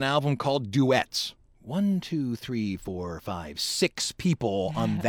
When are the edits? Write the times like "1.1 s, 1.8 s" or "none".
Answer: none